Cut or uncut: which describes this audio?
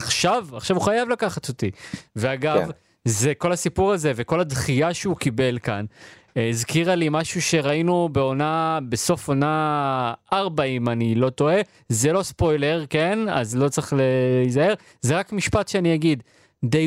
uncut